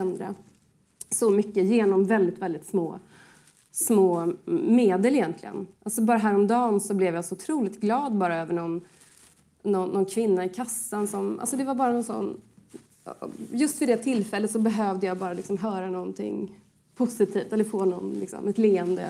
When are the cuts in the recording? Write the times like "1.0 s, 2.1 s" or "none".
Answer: none